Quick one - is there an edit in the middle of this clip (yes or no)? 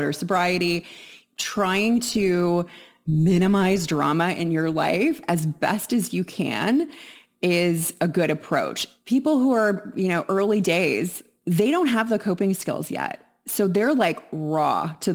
no